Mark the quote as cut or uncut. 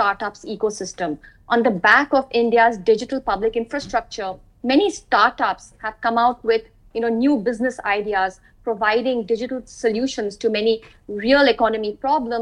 uncut